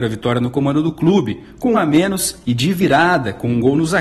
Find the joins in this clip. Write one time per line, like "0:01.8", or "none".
0:01.7